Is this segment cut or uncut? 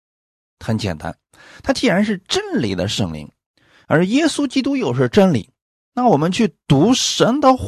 uncut